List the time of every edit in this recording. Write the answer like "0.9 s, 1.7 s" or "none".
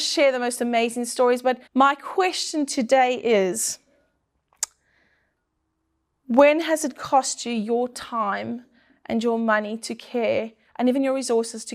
1.7 s